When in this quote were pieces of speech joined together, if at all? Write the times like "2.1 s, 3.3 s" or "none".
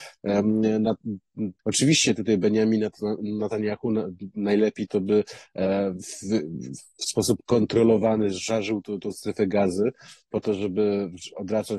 1.6 s, 8.8 s